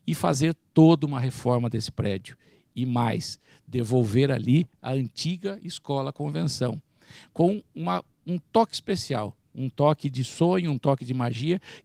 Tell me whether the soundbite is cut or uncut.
uncut